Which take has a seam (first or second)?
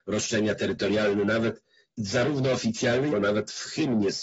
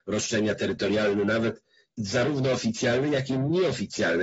first